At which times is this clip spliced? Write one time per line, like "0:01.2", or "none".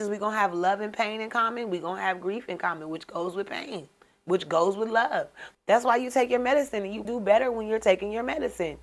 0:05.5
0:07.1